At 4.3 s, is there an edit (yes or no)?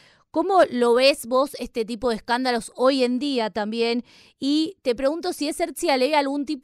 no